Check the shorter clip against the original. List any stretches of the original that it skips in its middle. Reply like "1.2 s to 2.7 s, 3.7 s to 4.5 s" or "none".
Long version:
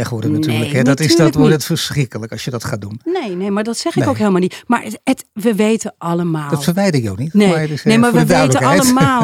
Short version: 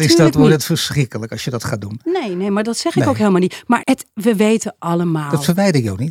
4.8 s to 5.0 s